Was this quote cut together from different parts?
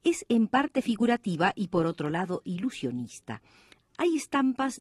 yes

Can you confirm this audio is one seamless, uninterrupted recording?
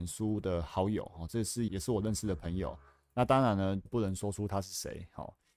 no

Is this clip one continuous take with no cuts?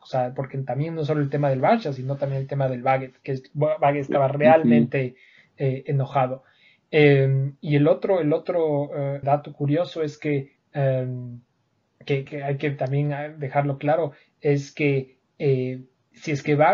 no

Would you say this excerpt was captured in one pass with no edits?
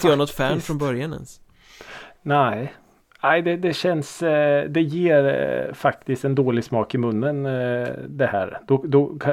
yes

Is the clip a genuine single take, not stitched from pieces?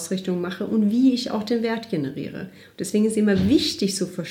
yes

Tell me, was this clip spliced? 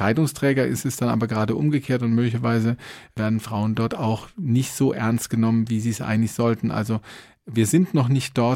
no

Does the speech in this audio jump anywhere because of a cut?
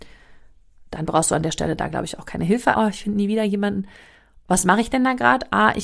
yes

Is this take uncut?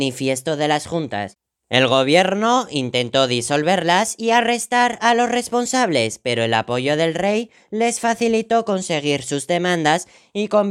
yes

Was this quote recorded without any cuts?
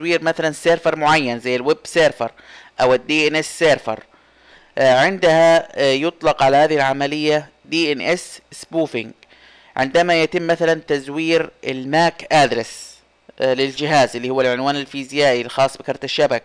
yes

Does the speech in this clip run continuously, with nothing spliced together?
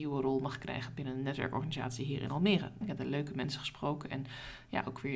no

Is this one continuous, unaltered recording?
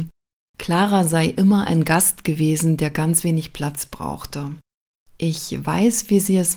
yes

